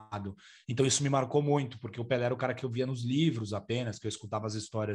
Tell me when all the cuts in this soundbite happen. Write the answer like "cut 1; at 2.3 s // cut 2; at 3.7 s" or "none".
none